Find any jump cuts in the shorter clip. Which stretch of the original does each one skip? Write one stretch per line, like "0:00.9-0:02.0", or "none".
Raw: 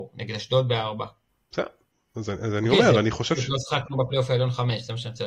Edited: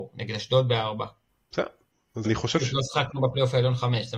0:02.2-0:03.0